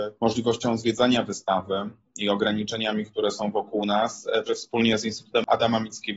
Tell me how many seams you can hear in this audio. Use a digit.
1